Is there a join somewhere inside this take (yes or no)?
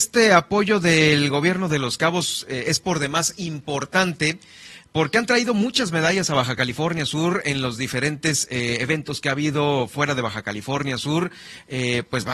no